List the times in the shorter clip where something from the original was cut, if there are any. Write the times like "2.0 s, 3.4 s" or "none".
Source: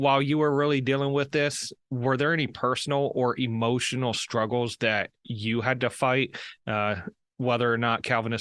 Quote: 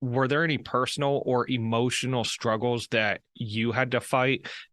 none